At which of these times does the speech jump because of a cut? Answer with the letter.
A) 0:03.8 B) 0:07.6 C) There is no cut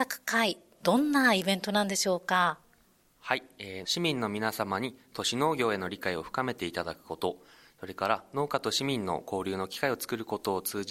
A